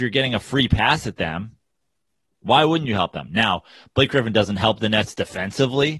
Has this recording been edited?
no; 0 cuts

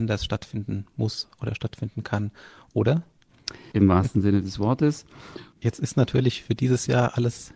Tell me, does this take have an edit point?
yes; 2 cuts; at 3.7 s, 5.5 s

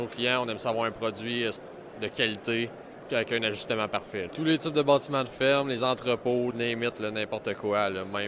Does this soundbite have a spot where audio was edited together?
yes; 2 cuts; at 4.3 s, 6.5 s

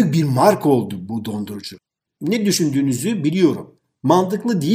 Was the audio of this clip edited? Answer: no; 0 cuts

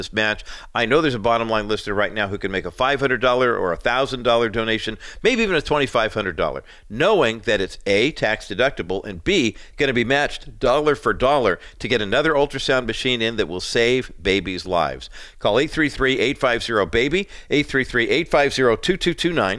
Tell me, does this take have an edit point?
no; 0 cuts

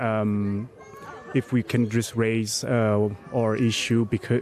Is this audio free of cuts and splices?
yes; 0 cuts

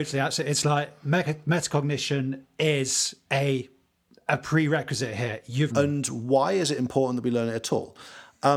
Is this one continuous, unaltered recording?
no; 1 cut; at 5.7 s

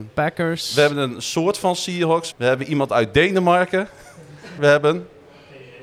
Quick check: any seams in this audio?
yes; 2 cuts; at 2.3 s, 4.6 s

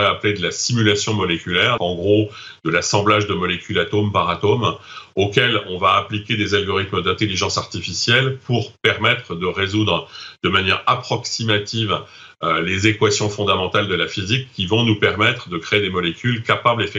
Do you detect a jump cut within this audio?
yes; 1 cut; at 1.8 s

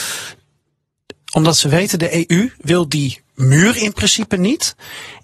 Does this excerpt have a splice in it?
yes; 1 cut; at 1.2 s

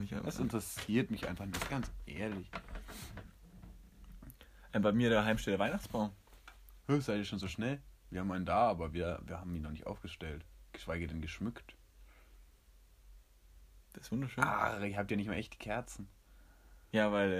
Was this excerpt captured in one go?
yes; 0 cuts

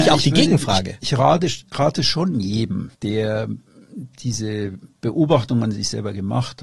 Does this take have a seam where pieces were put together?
yes; 1 cut; at 2.9 s

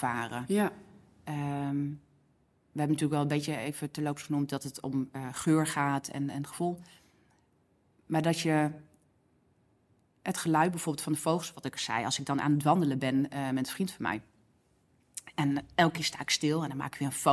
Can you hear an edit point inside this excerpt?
no; 0 cuts

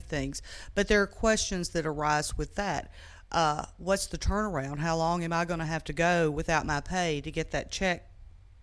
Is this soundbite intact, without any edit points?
yes; 0 cuts

